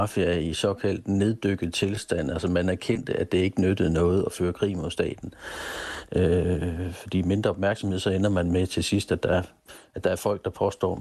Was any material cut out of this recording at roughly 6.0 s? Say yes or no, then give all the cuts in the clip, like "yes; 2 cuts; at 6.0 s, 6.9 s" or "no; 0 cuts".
yes; 1 cut; at 6.0 s